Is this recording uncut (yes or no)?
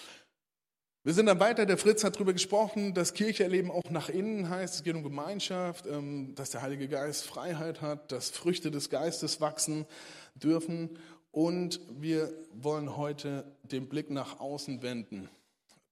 yes